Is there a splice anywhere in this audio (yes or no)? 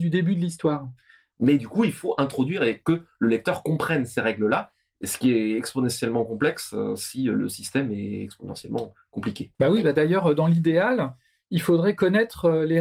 yes